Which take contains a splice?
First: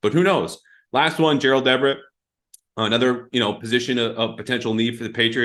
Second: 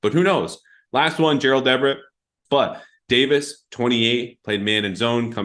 second; 1 cut; at 2.5 s

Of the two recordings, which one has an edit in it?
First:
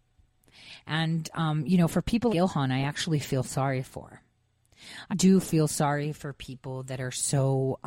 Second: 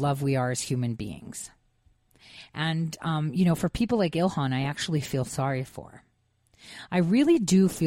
first; 2 cuts; at 2.3 s, 5.1 s

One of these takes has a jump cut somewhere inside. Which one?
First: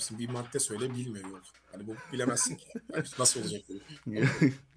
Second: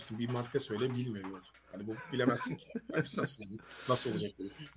first; 1 cut; at 3.1 s

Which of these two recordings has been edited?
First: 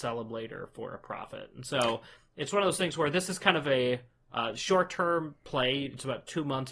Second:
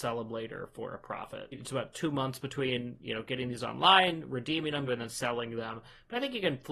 second; 2 cuts; at 1.5 s, 4.9 s

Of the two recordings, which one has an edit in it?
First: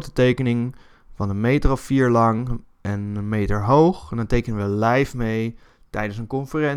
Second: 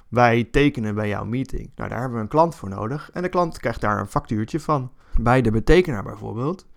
second; 2 cuts; at 1.7 s, 5.1 s

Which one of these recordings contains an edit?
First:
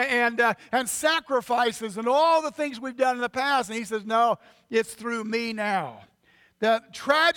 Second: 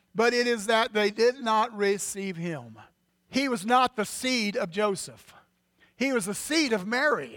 second; 1 cut; at 3.1 s

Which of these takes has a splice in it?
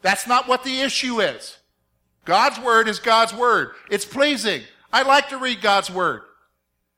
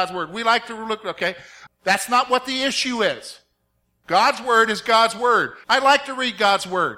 second; 2 cuts; at 1.7 s, 5.6 s

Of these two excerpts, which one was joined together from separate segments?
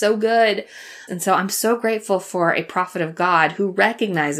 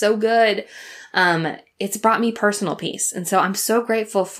first; 1 cut; at 1.1 s

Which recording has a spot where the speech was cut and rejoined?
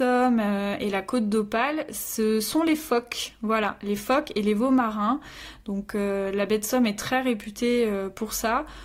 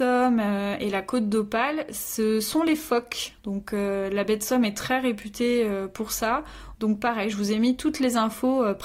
second; 2 cuts; at 3.4 s, 6.7 s

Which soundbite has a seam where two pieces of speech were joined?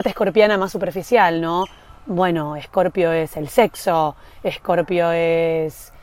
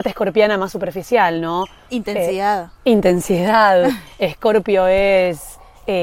second; 1 cut; at 1.9 s

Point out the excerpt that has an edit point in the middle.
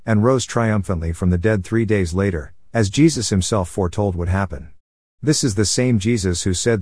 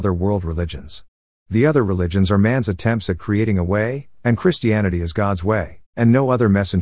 second; 1 cut; at 5.9 s

